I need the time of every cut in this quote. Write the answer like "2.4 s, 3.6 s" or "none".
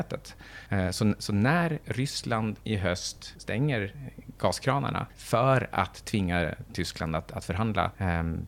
5.1 s